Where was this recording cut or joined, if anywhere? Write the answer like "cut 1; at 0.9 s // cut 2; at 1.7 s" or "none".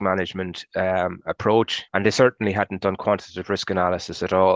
cut 1; at 1.9 s